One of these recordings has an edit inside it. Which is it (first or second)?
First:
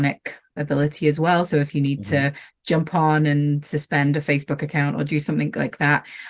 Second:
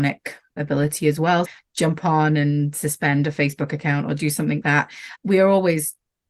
second